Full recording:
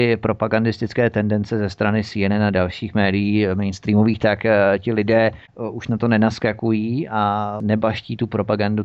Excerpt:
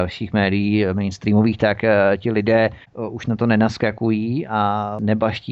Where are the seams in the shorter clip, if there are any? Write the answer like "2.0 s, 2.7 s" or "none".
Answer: none